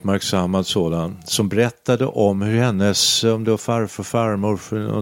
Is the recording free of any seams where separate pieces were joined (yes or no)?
yes